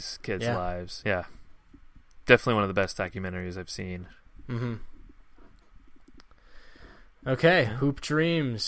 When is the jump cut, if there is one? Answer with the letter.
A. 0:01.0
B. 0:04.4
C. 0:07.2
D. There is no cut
A